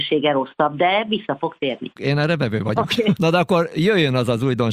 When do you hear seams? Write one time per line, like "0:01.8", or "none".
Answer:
0:02.0
0:03.2